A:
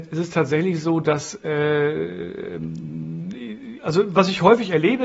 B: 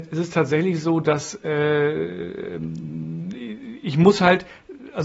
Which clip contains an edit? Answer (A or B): A